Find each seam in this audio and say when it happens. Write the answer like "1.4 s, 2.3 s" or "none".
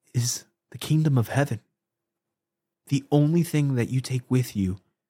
2.7 s